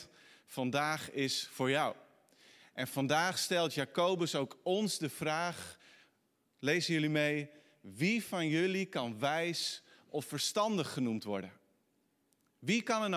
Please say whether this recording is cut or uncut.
uncut